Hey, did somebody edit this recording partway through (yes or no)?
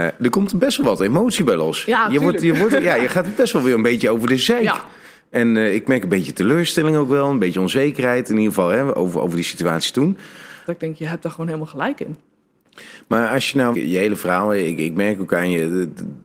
yes